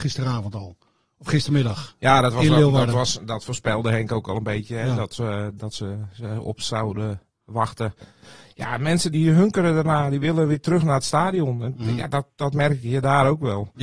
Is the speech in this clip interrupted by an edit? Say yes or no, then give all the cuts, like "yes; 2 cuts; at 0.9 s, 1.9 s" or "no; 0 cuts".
yes; 1 cut; at 9.1 s